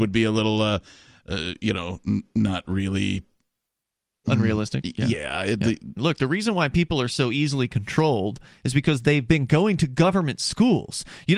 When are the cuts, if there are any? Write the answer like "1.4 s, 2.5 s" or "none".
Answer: 6.0 s